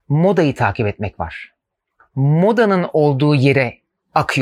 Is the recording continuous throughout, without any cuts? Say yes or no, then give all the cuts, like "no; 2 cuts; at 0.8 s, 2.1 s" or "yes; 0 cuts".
yes; 0 cuts